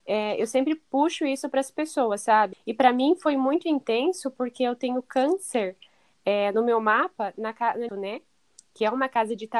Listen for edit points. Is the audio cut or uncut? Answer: cut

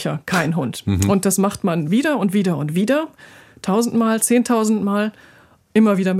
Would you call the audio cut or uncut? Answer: uncut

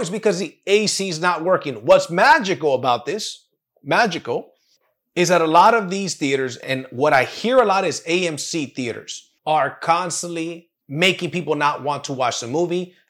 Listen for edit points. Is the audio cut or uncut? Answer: cut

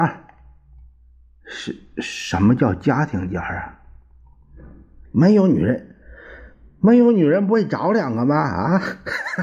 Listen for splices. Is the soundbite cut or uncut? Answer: cut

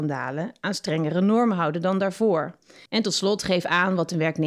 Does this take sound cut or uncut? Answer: cut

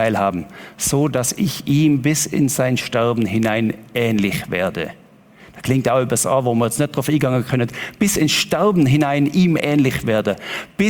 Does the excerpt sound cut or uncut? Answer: uncut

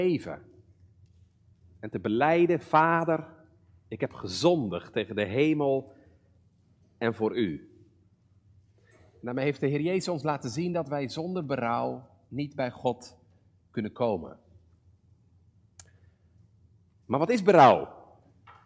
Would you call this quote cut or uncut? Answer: uncut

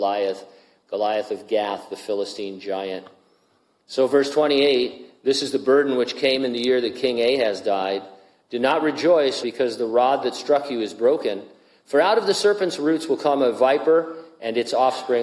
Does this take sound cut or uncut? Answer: cut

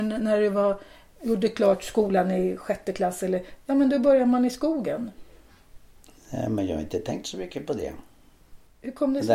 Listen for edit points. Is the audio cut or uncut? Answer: uncut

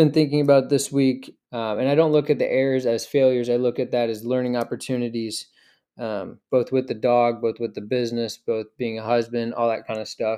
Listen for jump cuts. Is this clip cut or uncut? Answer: cut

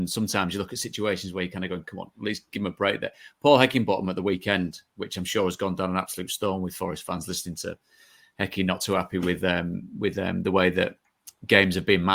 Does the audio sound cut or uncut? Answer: uncut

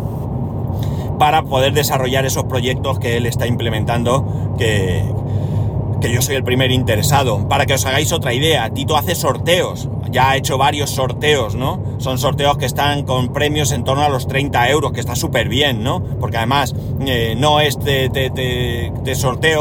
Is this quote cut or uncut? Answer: uncut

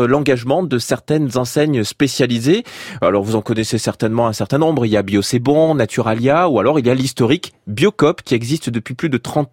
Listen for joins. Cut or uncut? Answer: uncut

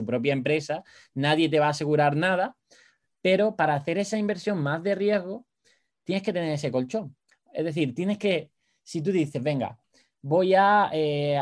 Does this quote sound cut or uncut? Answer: uncut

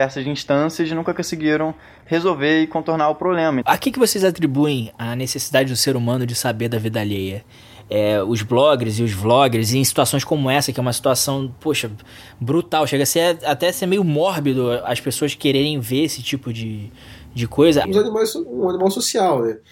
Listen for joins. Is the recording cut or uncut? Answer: cut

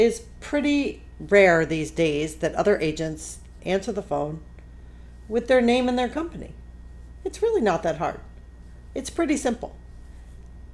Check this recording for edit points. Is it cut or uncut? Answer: cut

